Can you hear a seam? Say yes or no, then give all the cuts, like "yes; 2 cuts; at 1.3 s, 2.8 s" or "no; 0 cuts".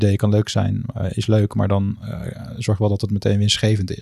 no; 0 cuts